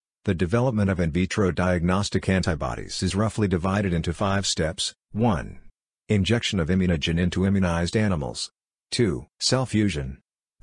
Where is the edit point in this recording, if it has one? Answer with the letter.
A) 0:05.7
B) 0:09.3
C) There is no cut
B